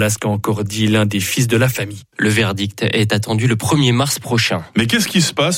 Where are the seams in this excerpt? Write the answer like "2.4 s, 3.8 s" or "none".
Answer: 2.1 s